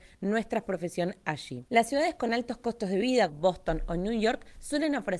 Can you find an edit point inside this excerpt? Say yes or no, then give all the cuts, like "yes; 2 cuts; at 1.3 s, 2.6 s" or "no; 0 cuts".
yes; 2 cuts; at 1.7 s, 3.3 s